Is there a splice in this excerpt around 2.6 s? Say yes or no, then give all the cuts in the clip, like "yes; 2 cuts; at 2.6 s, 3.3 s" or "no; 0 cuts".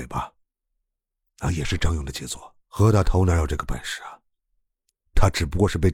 yes; 1 cut; at 2.6 s